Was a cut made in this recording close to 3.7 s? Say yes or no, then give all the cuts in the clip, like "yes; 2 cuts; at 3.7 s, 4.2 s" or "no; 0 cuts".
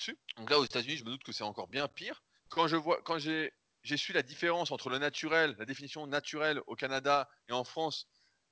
no; 1 cut; at 2.4 s